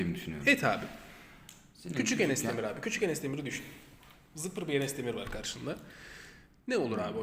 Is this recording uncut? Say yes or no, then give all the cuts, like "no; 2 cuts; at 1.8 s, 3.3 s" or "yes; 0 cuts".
yes; 0 cuts